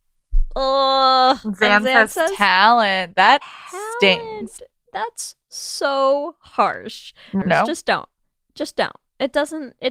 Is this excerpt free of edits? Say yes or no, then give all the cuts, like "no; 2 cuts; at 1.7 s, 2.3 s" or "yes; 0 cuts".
no; 1 cut; at 7.4 s